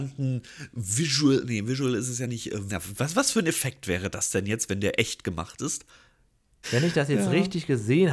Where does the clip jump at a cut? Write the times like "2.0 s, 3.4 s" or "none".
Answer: 2.7 s, 6.6 s